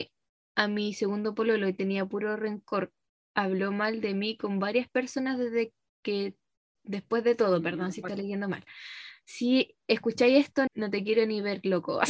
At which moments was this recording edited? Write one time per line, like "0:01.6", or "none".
0:10.7